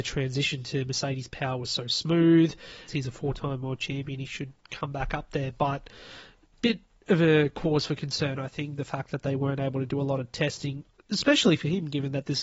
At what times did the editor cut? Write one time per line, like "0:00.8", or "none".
0:02.9